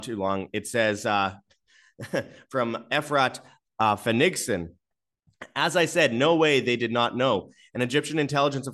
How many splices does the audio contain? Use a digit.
0